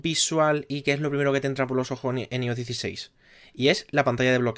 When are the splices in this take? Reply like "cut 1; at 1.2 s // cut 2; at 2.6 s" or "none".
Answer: none